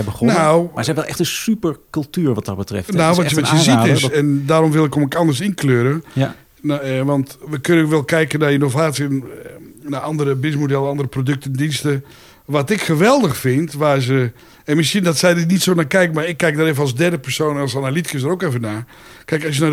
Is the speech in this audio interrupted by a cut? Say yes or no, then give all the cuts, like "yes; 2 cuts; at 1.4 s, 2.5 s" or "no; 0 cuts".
no; 0 cuts